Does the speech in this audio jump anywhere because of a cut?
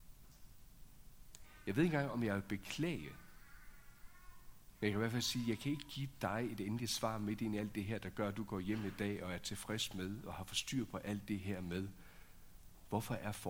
no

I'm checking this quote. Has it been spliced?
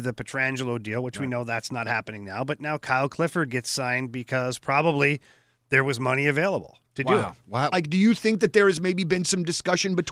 yes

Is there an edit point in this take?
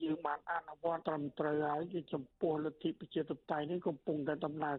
yes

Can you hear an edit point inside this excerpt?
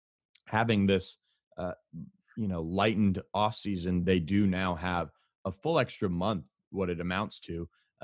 no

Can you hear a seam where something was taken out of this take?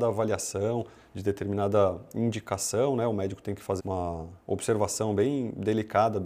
yes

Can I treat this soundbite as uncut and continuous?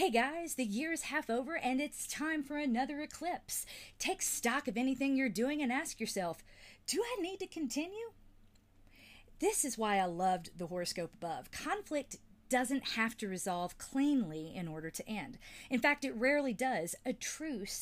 yes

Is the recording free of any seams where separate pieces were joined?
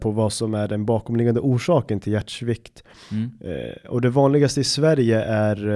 yes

